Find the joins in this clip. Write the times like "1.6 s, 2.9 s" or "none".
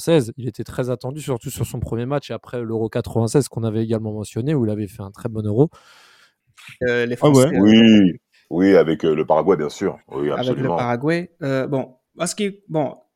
6.8 s